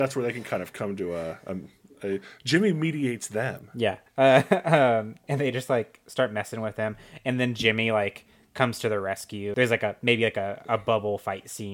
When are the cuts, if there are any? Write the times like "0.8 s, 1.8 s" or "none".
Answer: 4.1 s

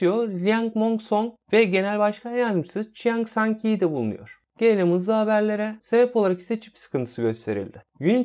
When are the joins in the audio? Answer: 5.8 s

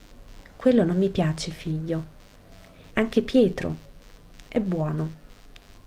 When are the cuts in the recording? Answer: 2.9 s

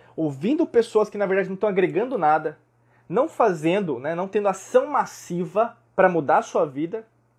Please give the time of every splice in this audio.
5.9 s

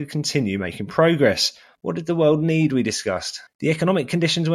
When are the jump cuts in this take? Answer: 1.7 s, 3.5 s

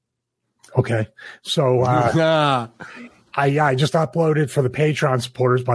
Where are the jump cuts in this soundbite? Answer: none

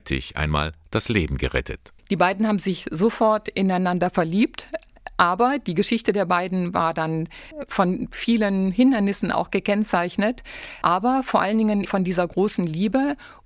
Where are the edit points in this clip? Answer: 2.0 s, 11.9 s

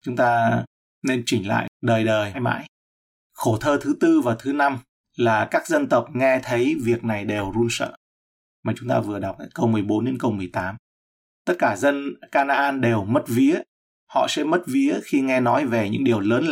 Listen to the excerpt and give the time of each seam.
2.3 s, 14.0 s

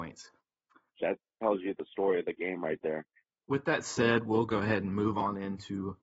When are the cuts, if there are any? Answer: 1.0 s, 3.3 s

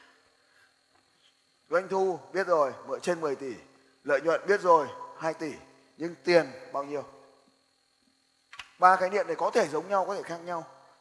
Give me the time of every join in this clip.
none

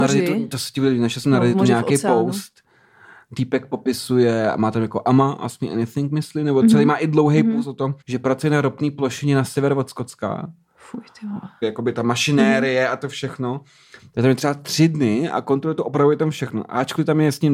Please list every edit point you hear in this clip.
8.0 s, 11.6 s

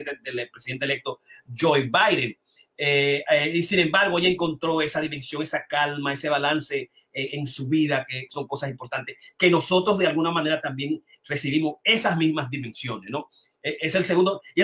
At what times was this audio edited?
none

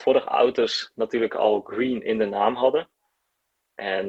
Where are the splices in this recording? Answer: none

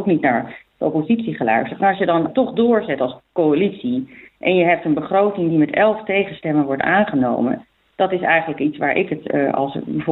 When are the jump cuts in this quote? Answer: 2.3 s

